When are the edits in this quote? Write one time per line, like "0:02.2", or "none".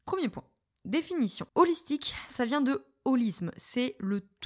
0:01.5